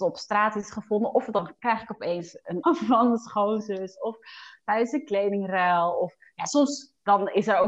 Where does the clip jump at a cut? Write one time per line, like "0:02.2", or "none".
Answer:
0:02.6